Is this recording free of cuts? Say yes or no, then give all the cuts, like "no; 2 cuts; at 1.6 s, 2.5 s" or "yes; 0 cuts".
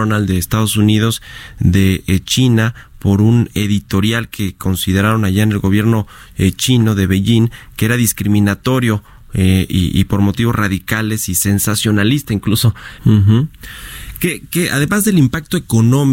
no; 1 cut; at 13.0 s